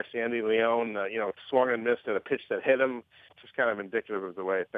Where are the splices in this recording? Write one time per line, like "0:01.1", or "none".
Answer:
0:03.3